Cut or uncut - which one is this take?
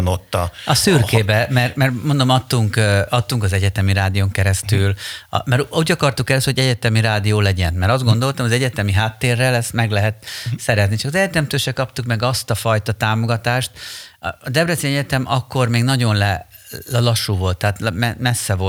uncut